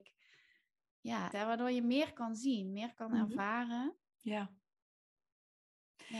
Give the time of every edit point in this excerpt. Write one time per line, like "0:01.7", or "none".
0:01.3
0:04.1